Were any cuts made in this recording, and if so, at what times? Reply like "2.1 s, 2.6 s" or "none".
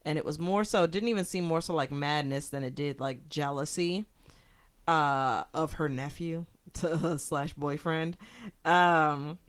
none

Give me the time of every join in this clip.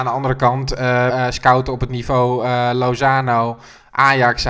1.1 s

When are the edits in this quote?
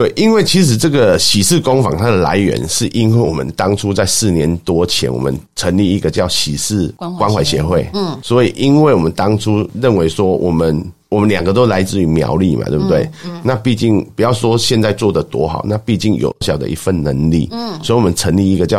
16.4 s

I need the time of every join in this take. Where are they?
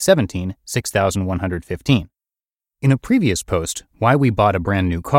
none

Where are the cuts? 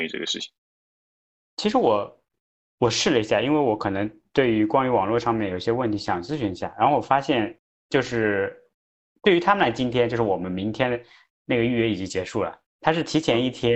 12.7 s

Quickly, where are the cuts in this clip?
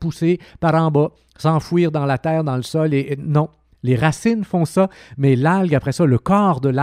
none

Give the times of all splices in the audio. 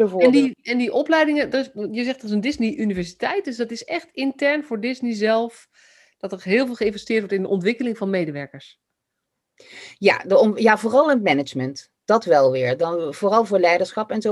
none

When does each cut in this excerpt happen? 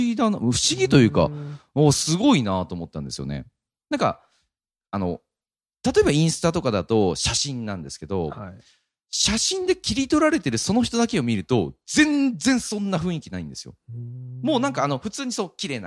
none

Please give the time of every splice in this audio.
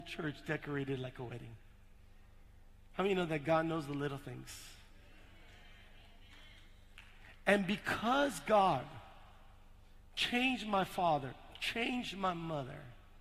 none

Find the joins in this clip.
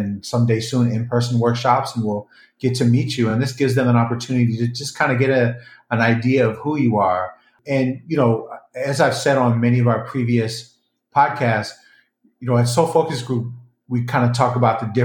none

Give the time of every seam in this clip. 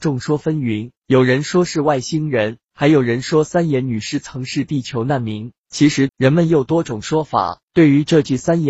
6.1 s, 7.6 s

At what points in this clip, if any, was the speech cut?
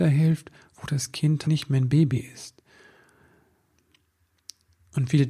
1.4 s

